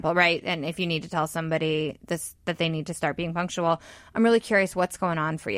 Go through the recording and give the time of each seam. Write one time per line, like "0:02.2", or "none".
none